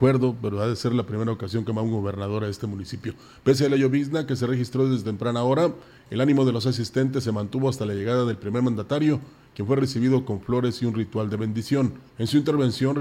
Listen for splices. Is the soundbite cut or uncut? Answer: cut